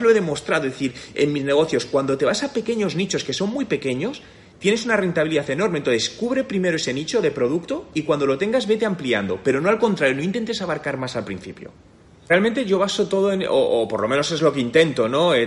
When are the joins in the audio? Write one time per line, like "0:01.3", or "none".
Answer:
none